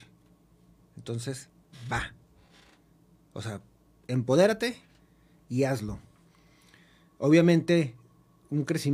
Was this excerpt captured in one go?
yes; 0 cuts

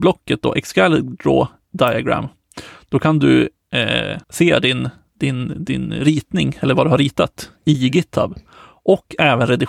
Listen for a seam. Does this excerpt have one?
yes; 1 cut; at 4.2 s

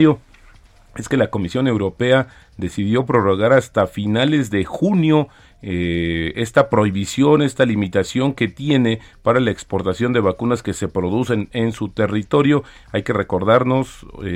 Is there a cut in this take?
no; 0 cuts

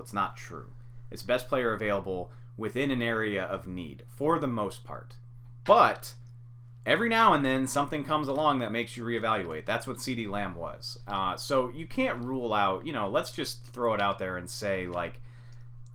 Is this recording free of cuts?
yes; 0 cuts

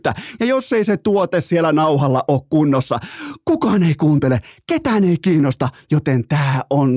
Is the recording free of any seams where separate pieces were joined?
yes; 0 cuts

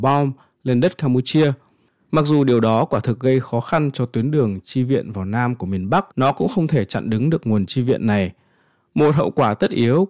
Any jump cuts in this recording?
yes; 1 cut; at 6.1 s

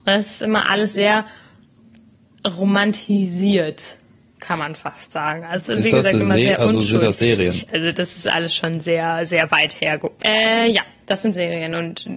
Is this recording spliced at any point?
yes; 2 cuts; at 7.7 s, 10.2 s

